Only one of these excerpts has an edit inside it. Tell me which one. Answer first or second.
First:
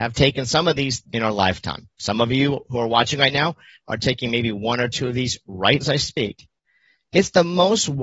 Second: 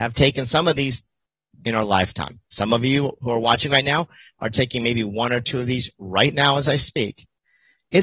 first